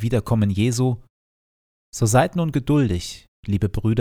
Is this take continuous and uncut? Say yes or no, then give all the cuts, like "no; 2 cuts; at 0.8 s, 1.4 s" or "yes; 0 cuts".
yes; 0 cuts